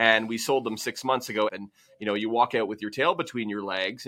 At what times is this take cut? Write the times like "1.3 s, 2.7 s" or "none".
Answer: 1.5 s